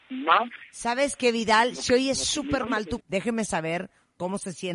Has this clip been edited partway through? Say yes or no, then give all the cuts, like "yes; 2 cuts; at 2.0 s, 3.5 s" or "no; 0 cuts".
yes; 1 cut; at 3.0 s